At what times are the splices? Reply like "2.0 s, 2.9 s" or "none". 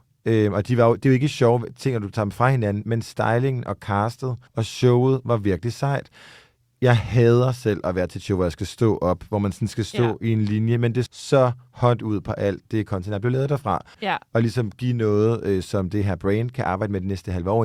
4.5 s, 11.1 s, 13.9 s